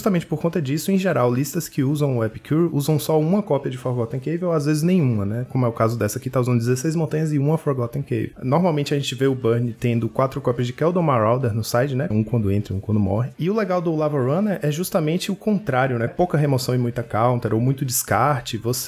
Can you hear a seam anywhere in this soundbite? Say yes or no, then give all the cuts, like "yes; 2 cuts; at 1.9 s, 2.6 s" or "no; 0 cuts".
yes; 3 cuts; at 8.3 s, 12.1 s, 16.1 s